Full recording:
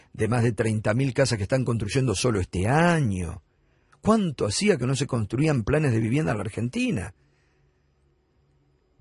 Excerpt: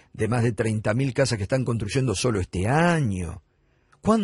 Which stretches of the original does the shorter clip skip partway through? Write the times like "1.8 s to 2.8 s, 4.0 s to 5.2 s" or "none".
none